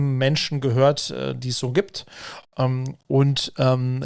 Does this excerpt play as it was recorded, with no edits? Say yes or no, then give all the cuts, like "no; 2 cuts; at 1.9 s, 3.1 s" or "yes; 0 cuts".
yes; 0 cuts